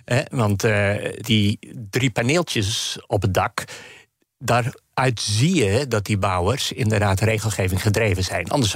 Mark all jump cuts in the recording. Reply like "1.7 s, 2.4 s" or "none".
1.2 s

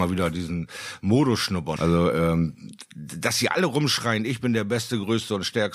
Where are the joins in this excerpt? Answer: 1.8 s

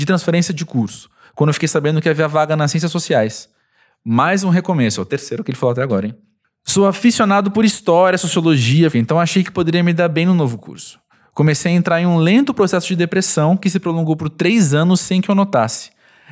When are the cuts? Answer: 8.9 s

